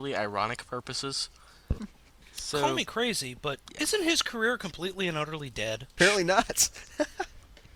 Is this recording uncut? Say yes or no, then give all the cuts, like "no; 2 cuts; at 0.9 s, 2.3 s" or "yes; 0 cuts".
no; 2 cuts; at 1.8 s, 6.0 s